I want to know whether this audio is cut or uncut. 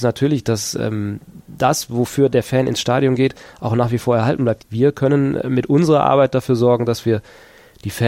cut